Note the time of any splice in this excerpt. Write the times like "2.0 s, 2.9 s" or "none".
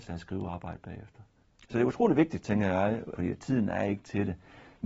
1.4 s, 3.2 s